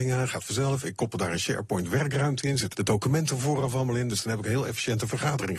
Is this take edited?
yes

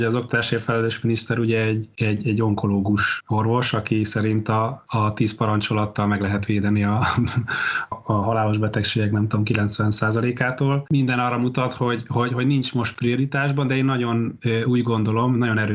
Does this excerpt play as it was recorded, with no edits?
no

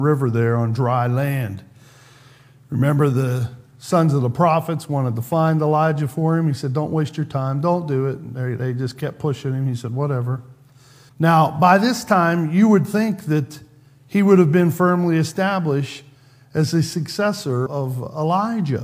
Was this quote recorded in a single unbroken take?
no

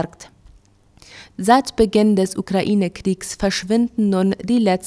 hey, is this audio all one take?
no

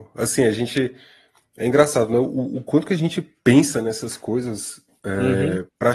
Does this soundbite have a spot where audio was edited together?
no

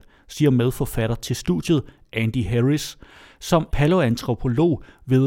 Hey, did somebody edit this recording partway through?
yes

